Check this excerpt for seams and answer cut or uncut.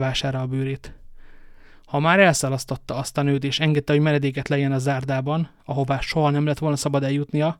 uncut